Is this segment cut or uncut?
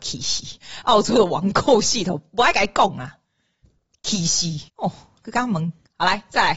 cut